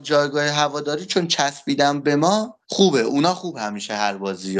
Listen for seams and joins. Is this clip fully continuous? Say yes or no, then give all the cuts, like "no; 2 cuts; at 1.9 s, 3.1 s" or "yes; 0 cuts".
no; 1 cut; at 2.6 s